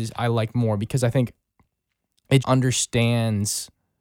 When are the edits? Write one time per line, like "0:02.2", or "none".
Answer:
0:02.4